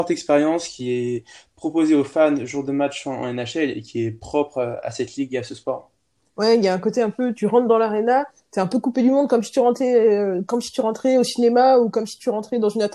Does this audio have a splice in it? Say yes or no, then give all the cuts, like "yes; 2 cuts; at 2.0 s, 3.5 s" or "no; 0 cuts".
no; 0 cuts